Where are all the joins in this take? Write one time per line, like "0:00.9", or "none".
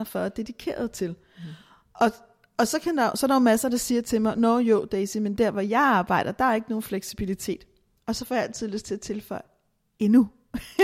none